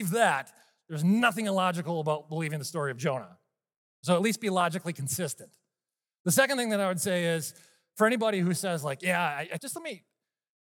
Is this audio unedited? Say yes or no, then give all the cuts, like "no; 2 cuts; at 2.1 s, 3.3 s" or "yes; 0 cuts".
no; 1 cut; at 9.6 s